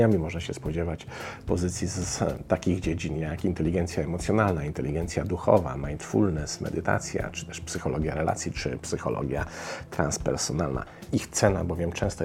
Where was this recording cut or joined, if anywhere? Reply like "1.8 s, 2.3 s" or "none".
11.1 s